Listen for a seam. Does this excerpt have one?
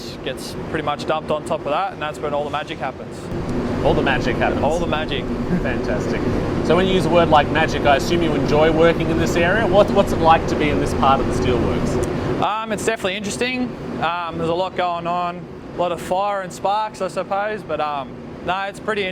yes; 1 cut; at 15.7 s

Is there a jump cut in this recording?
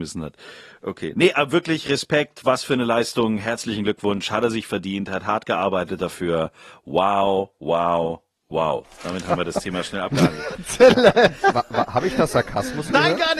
no; 0 cuts

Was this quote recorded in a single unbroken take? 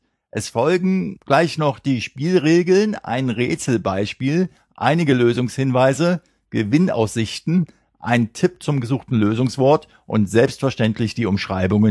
yes; 0 cuts

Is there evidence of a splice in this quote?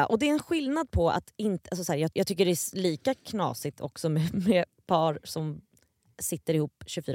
yes; 1 cut; at 2.1 s

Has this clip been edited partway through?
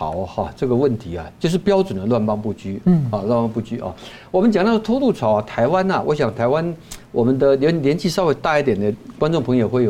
no; 0 cuts

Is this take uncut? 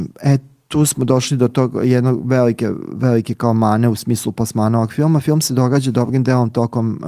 yes; 0 cuts

